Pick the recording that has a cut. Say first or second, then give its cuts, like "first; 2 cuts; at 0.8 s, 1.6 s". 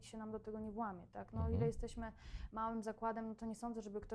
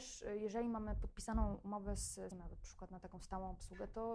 second; 1 cut; at 2.3 s